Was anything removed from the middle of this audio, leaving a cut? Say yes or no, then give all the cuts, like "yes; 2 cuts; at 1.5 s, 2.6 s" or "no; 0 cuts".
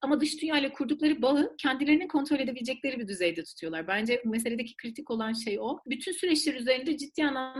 no; 0 cuts